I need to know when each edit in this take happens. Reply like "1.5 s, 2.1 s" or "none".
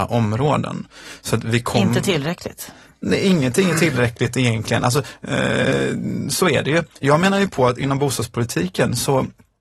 none